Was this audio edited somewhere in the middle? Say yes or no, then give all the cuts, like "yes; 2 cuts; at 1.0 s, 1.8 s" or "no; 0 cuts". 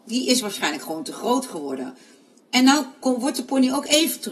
no; 0 cuts